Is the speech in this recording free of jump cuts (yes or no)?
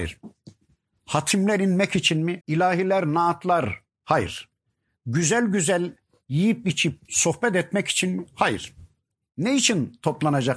no